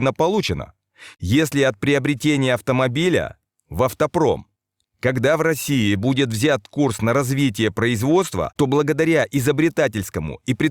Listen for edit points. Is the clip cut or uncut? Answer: cut